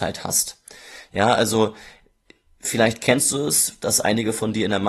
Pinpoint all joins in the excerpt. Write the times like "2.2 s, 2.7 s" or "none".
none